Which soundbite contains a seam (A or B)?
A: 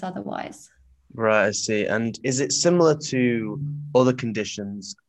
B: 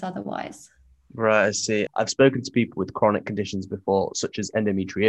B